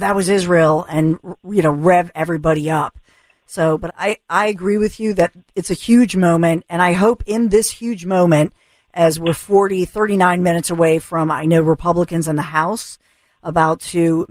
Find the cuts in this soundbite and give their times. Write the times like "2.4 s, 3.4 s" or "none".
3.9 s